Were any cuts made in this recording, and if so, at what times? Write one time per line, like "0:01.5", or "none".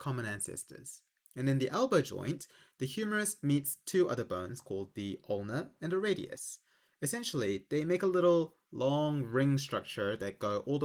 0:01.3